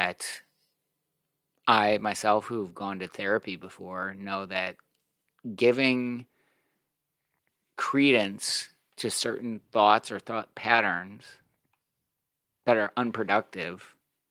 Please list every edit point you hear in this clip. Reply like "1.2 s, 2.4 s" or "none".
none